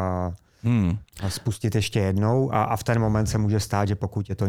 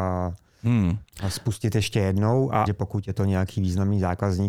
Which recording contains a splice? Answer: second; 1 cut; at 2.7 s

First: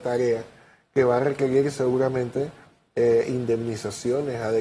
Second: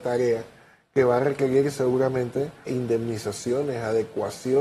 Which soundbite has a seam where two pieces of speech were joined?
second; 1 cut; at 2.7 s

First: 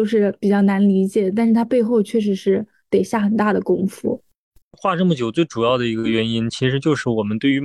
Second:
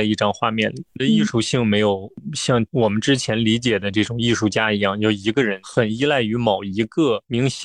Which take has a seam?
first; 1 cut; at 4.6 s

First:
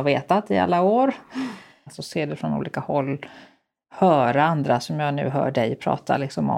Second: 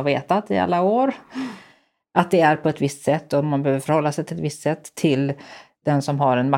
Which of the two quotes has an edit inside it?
first; 1 cut; at 1.9 s

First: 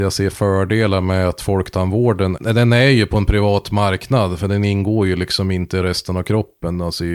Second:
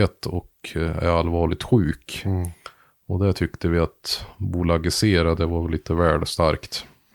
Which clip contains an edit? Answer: second; 1 cut; at 5.4 s

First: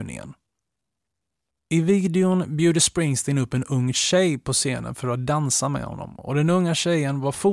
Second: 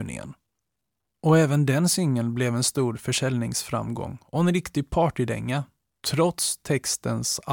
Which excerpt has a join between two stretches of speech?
second; 1 cut; at 1.0 s

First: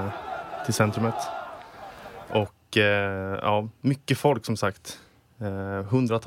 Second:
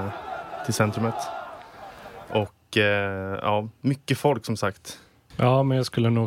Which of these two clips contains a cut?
second; 1 cut; at 5.3 s

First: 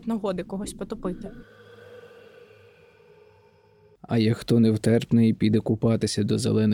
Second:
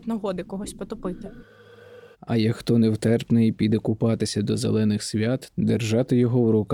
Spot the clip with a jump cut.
second; 2 cuts; at 2.1 s, 5.5 s

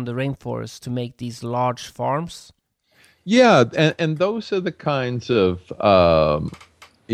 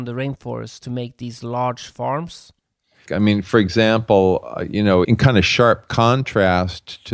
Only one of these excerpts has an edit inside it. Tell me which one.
second; 2 cuts; at 3.1 s, 5.0 s

